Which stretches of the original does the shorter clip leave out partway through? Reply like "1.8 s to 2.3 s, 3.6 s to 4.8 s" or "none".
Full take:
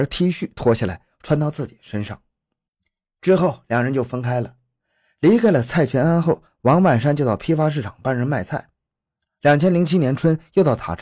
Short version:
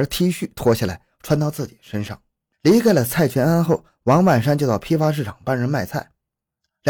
2.5 s to 5.1 s

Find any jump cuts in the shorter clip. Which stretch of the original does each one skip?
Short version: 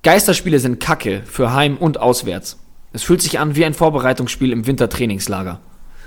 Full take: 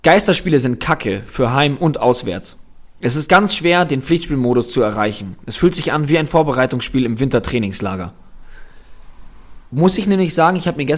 2.9 s to 5.4 s

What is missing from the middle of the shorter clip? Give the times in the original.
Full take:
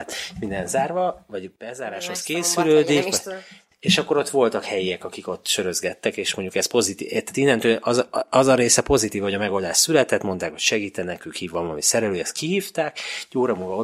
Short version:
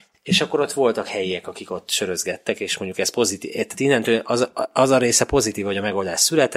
none

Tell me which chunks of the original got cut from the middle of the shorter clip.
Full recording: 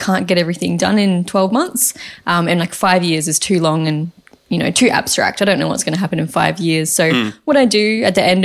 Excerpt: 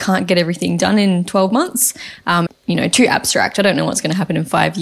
2.5 s to 4.3 s

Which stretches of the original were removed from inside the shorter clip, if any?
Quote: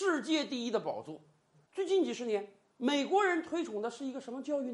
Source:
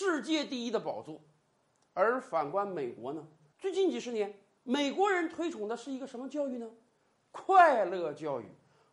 1.5 s to 3.4 s

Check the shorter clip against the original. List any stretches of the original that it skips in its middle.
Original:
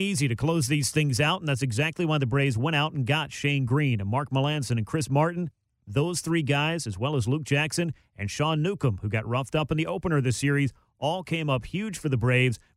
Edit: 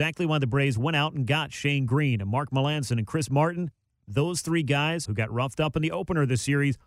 6.8 s to 9.0 s

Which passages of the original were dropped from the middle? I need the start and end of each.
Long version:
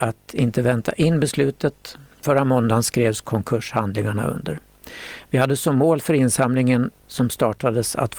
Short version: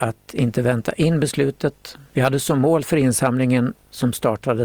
2.1 s to 5.3 s

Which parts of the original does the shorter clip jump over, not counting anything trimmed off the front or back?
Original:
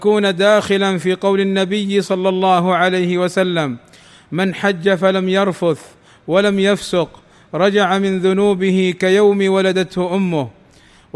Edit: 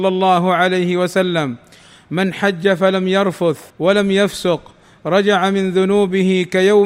5.9 s to 6.2 s

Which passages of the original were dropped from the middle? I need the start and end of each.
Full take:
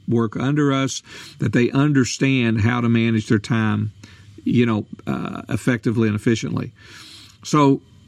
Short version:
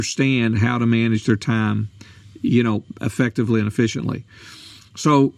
5.0 s to 5.4 s

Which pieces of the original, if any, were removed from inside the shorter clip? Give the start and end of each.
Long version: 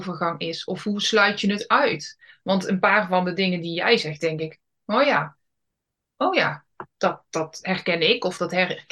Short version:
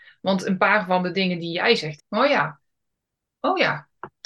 4.2 s to 4.7 s

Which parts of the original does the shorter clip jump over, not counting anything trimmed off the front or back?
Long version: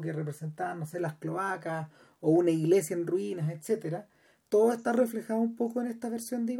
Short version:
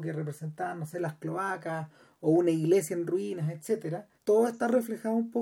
4.1 s to 4.4 s

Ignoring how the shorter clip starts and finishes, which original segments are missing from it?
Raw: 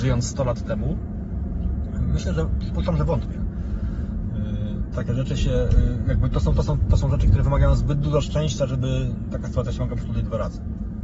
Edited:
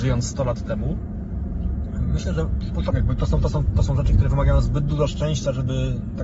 2.9 s to 6.0 s

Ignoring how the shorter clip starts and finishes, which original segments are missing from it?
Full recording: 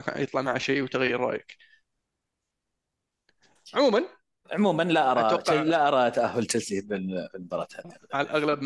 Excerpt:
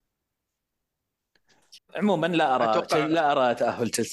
3.7 s to 4.3 s

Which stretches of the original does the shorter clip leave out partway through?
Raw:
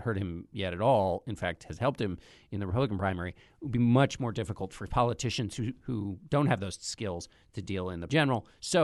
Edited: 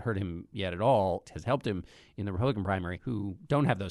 1.2 s to 1.6 s, 3.3 s to 5.8 s

